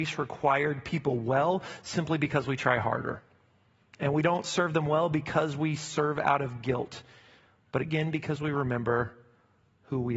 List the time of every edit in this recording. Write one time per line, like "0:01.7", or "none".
none